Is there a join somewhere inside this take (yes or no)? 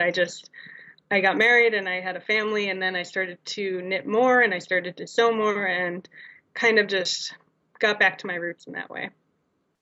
no